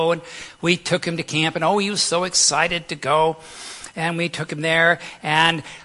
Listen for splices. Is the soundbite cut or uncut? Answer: uncut